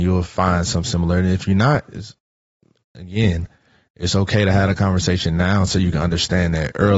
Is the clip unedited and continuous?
yes; 0 cuts

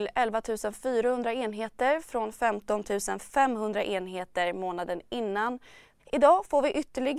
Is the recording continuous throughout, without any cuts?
no; 1 cut; at 6.0 s

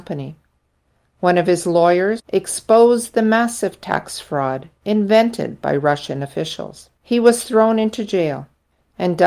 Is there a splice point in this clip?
yes; 2 cuts; at 2.2 s, 7.0 s

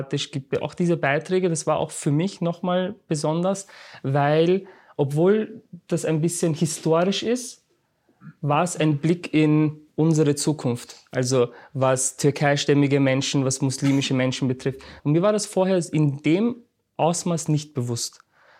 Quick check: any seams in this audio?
yes; 1 cut; at 15.0 s

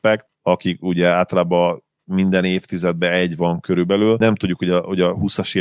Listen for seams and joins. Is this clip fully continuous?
yes; 0 cuts

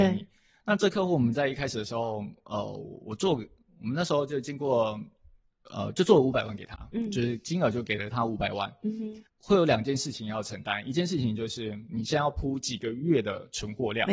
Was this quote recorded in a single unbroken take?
no; 1 cut; at 9.3 s

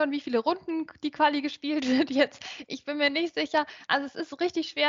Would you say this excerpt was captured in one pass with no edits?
yes; 0 cuts

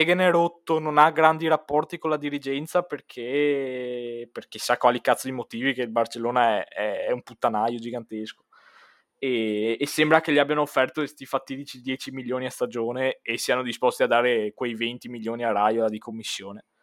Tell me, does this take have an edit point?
no; 0 cuts

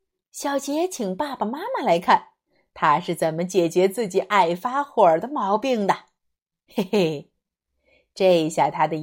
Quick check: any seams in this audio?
no; 0 cuts

